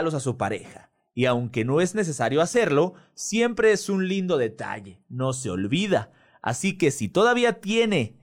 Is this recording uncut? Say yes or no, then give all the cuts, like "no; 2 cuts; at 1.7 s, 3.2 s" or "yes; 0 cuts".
yes; 0 cuts